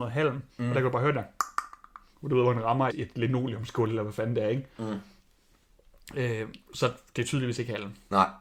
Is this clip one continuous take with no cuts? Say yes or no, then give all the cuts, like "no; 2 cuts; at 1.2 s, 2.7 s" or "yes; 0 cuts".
no; 1 cut; at 2.9 s